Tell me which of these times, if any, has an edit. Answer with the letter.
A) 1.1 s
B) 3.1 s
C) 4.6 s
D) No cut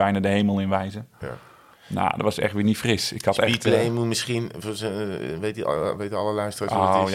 D